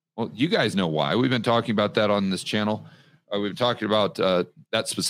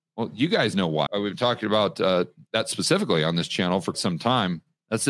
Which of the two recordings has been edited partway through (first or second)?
second